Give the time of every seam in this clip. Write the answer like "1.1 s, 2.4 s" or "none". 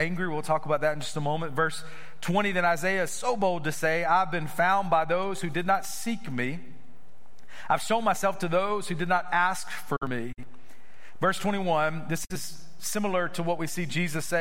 none